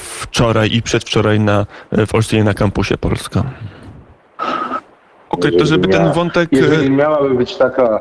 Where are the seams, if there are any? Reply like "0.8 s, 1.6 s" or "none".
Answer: 5.3 s